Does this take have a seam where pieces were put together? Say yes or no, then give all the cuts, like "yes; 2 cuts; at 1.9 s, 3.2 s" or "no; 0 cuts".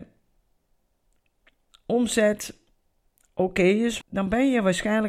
yes; 1 cut; at 4.0 s